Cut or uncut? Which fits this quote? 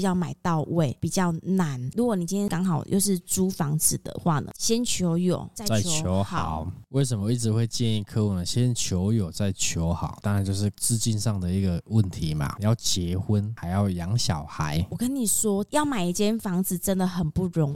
cut